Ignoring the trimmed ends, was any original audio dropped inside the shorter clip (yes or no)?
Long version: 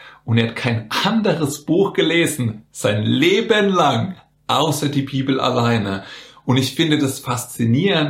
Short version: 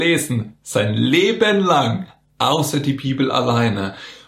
no